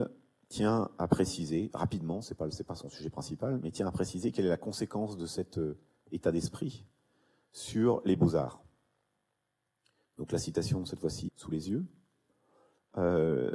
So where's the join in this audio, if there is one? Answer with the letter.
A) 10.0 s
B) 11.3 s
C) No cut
B